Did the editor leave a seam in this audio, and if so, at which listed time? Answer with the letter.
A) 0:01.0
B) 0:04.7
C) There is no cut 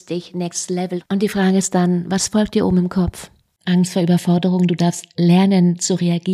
A